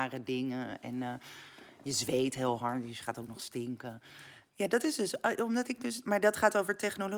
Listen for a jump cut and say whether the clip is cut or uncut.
cut